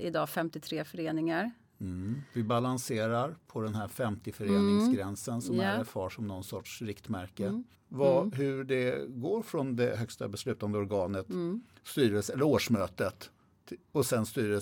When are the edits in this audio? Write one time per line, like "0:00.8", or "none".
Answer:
0:07.7